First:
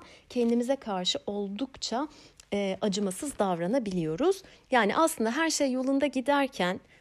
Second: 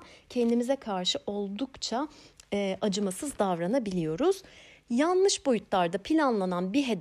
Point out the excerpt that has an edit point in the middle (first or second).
first